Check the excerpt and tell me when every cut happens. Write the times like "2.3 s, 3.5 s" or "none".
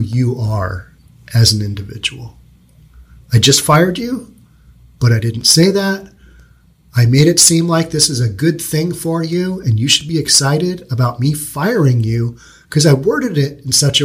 none